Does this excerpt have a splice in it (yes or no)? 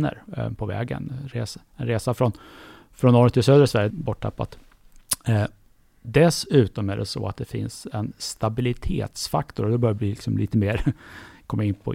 yes